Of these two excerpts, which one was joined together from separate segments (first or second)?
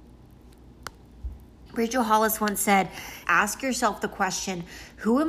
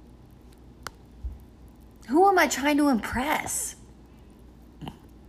first